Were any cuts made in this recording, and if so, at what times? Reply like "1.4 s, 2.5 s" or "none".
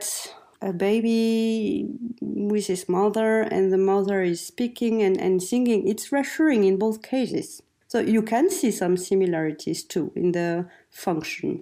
none